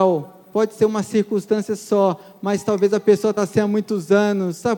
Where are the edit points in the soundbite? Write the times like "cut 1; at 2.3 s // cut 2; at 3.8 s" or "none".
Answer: none